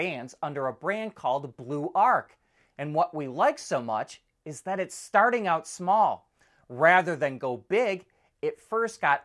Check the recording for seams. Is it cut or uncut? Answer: uncut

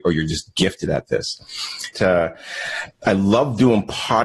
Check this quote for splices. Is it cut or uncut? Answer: cut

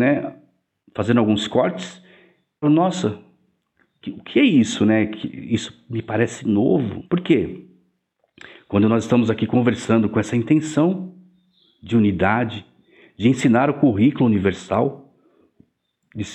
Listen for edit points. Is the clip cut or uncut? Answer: cut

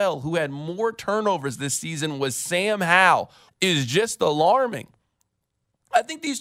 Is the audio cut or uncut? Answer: cut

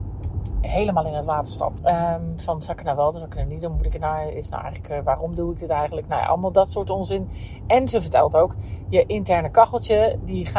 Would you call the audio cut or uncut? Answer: cut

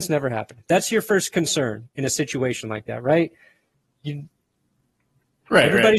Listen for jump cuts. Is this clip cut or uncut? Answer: uncut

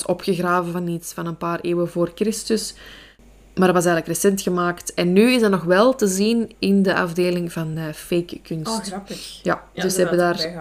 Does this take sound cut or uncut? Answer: uncut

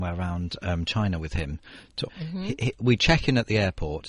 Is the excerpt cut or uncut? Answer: cut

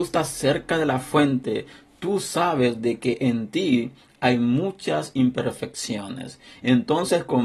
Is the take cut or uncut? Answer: uncut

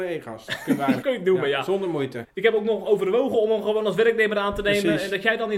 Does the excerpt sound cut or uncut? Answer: cut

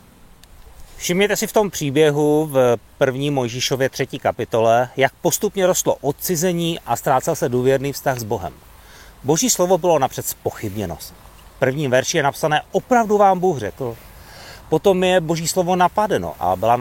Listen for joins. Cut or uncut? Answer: uncut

